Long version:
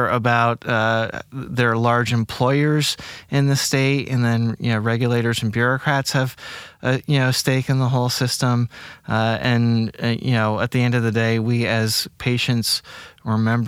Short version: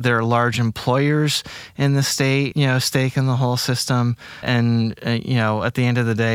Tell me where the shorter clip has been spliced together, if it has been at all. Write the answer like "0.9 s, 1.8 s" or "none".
2.5 s, 4.4 s